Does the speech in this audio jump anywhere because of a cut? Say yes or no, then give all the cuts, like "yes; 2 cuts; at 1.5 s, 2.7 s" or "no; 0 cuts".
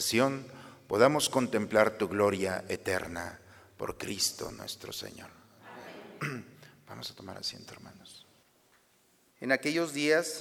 yes; 1 cut; at 9.3 s